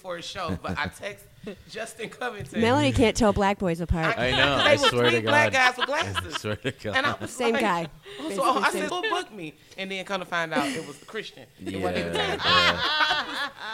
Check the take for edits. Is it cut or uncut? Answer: cut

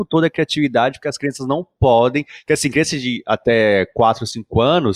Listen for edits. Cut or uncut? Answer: uncut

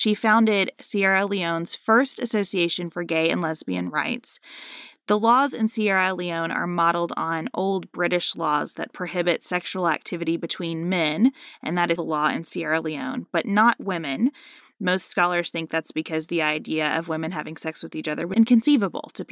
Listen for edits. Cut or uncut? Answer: cut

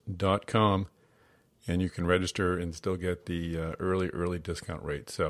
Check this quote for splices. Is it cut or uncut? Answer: uncut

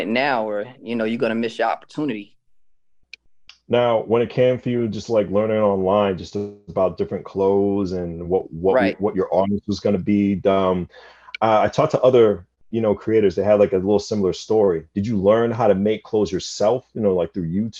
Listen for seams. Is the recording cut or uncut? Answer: uncut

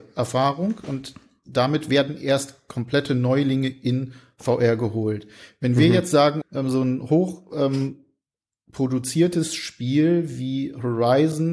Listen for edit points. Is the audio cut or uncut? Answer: cut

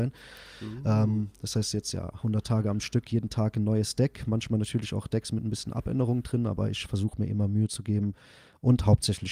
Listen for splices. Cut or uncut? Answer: uncut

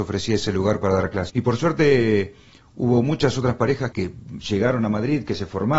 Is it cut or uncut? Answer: cut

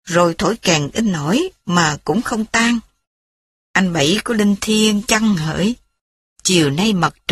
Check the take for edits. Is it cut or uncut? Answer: uncut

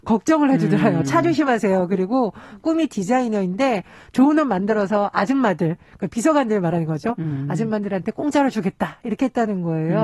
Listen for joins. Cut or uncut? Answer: uncut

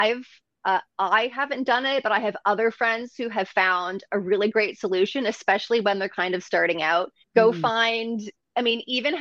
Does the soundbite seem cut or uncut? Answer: cut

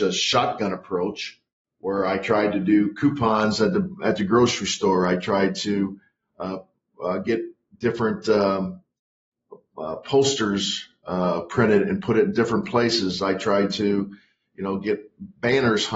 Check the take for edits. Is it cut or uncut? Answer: uncut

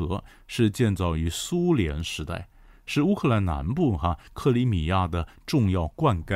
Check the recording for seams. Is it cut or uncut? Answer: uncut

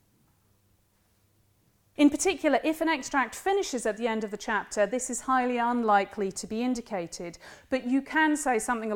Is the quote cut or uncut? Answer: cut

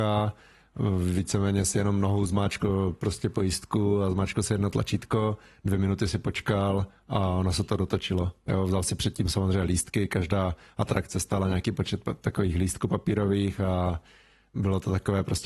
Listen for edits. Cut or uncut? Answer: uncut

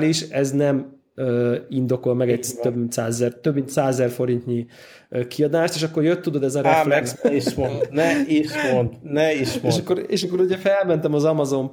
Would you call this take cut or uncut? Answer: cut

